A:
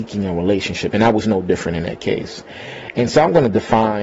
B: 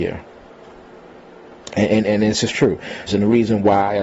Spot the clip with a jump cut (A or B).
B